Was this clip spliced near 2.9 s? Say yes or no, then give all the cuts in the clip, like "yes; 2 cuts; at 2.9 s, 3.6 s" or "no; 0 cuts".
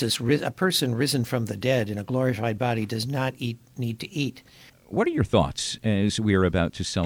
no; 1 cut; at 4.7 s